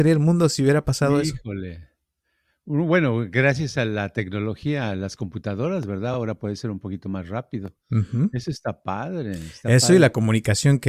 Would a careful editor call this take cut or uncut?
uncut